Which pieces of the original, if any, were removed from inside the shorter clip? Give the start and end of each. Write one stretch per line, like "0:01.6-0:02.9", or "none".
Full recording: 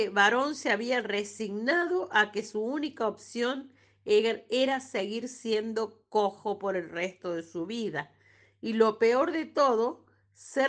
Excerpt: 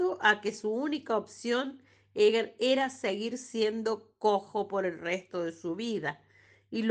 none